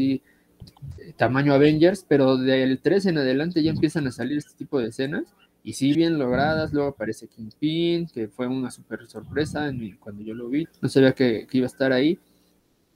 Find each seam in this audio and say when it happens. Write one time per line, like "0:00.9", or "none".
0:05.9
0:10.6